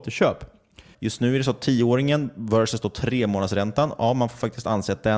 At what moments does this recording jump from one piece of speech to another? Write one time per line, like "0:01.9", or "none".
0:00.9

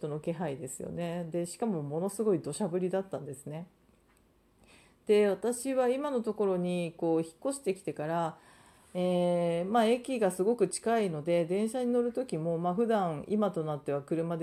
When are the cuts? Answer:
none

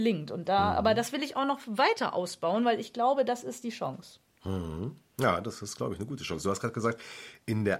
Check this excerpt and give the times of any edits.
none

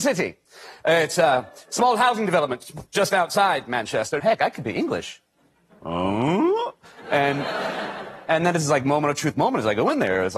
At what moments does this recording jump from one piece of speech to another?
0:04.2

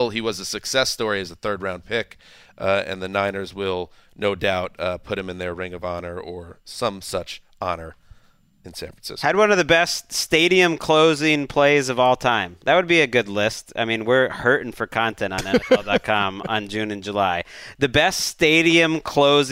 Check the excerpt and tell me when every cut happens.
none

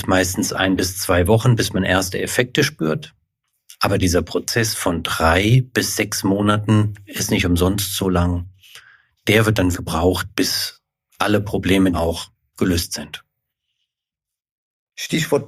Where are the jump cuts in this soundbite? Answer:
0:09.7
0:11.9

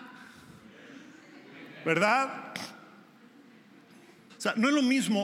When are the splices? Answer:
0:04.3

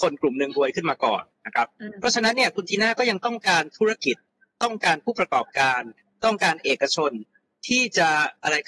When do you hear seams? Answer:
none

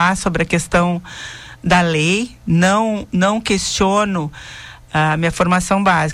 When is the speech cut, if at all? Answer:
none

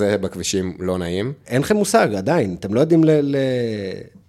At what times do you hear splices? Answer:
0:01.4

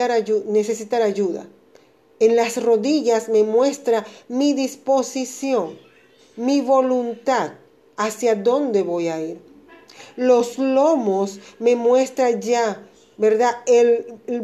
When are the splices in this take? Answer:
none

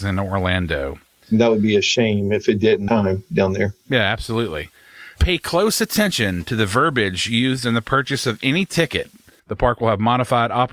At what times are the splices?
0:02.9
0:09.4

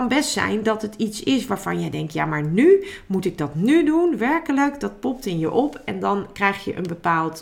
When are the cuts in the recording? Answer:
none

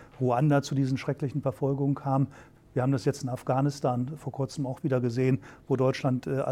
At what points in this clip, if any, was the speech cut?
0:02.6

